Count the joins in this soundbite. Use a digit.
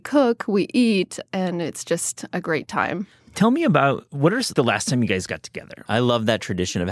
2